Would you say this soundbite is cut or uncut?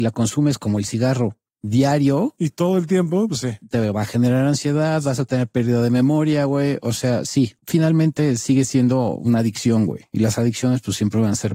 uncut